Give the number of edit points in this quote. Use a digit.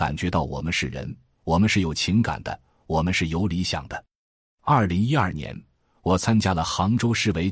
0